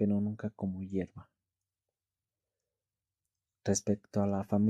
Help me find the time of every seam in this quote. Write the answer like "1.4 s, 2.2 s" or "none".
none